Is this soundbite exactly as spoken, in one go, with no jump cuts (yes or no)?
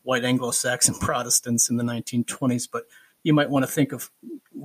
yes